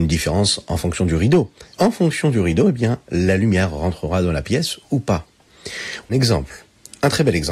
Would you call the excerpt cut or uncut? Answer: cut